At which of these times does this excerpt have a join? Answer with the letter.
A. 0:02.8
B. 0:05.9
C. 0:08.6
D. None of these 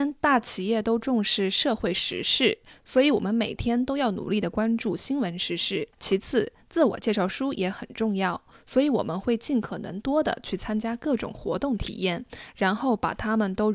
B